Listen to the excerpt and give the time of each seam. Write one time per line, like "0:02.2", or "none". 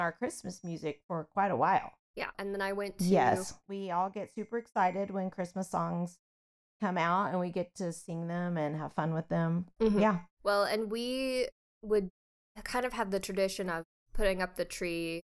0:02.3
0:03.6